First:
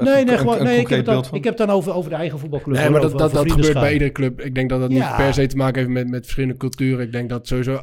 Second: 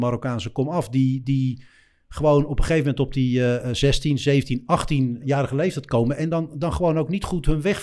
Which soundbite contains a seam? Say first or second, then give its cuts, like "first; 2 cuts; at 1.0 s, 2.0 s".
second; 1 cut; at 5.2 s